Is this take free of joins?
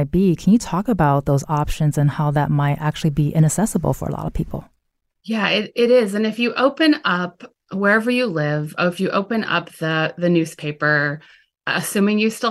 yes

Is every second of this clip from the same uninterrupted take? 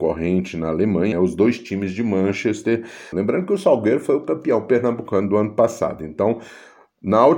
no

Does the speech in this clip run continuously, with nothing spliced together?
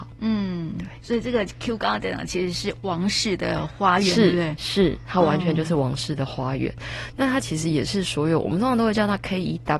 yes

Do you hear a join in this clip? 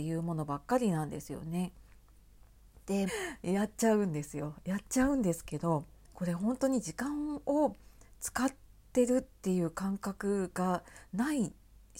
yes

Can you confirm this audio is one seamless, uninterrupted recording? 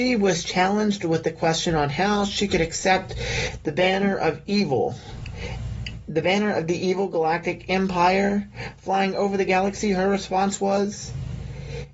yes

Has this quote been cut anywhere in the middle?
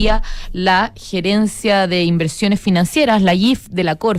no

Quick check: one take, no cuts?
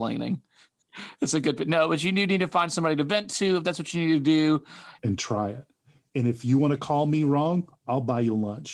no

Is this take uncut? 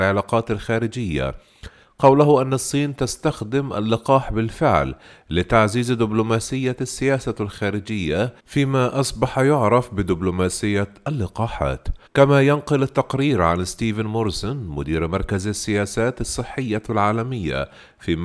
no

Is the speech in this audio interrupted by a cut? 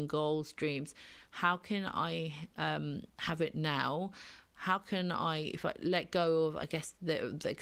no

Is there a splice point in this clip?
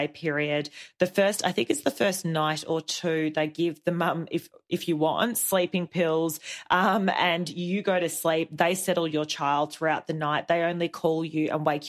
no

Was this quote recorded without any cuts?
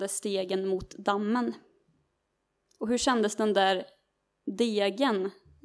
yes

